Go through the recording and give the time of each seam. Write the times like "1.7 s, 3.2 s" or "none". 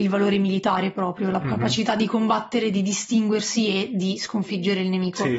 none